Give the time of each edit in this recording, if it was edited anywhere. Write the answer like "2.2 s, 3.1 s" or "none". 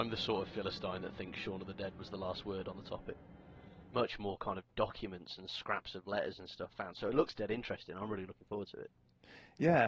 3.9 s

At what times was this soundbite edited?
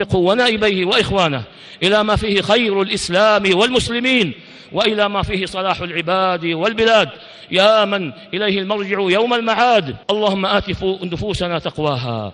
10.0 s

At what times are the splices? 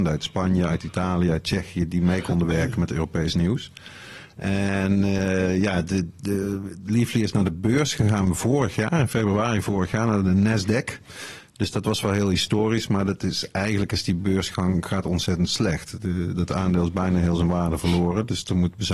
none

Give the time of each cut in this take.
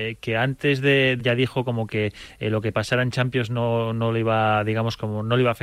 1.2 s

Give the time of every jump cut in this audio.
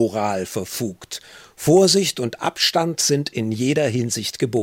none

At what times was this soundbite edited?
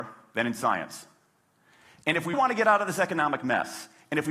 2.3 s

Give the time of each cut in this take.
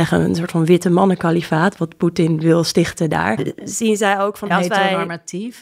3.4 s, 4.5 s

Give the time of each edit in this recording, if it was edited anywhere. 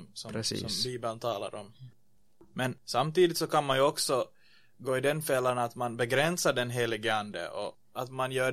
none

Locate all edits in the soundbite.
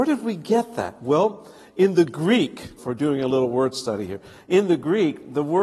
2.8 s

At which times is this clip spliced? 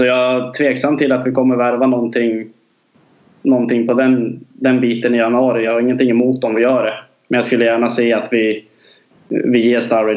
none

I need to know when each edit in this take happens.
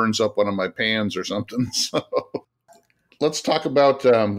none

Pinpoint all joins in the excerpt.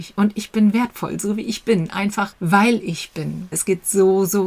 3.5 s

